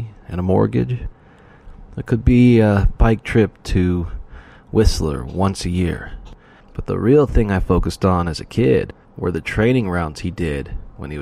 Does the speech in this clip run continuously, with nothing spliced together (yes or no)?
no